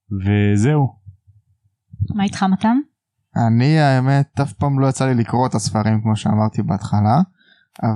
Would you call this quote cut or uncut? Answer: uncut